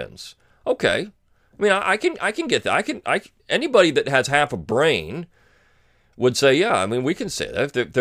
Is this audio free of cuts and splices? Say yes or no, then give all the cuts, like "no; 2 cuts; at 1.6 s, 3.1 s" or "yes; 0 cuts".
yes; 0 cuts